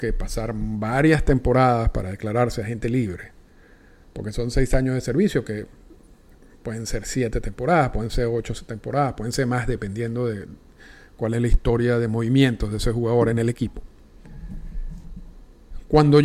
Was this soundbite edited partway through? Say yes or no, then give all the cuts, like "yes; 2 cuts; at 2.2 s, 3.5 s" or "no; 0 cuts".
no; 0 cuts